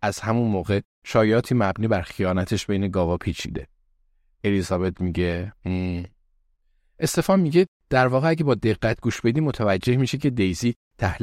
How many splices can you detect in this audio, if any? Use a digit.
0